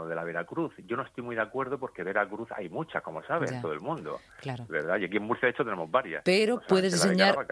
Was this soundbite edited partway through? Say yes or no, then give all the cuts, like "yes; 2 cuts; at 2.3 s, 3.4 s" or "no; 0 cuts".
no; 0 cuts